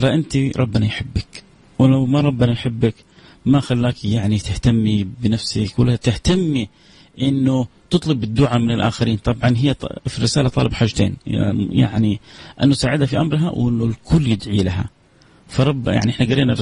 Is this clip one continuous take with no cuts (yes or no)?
yes